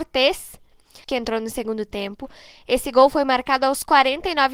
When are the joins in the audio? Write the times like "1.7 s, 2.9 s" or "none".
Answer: 1.0 s